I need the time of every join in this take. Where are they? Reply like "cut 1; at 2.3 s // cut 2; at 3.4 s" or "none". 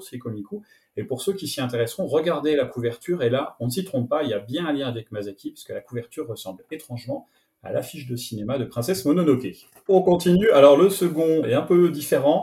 cut 1; at 11.4 s